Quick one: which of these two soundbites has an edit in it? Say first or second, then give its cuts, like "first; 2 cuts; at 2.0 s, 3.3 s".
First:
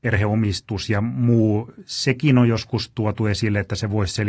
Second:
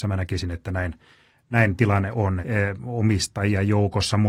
second; 1 cut; at 2.4 s